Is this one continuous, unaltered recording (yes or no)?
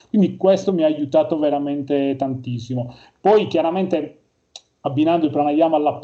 yes